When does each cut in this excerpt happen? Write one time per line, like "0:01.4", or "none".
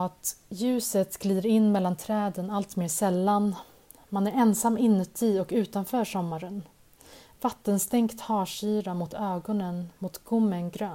none